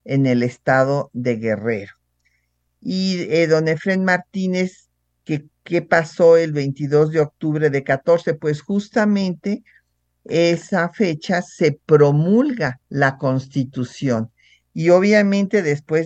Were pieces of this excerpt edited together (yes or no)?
yes